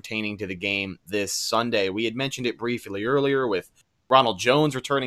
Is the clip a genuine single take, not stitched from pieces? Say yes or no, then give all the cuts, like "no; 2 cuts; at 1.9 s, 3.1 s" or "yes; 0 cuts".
yes; 0 cuts